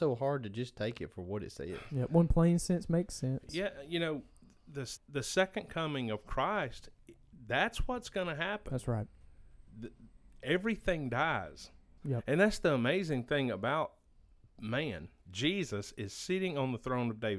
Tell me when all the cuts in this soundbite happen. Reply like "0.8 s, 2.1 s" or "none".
5.0 s, 12.0 s, 15.2 s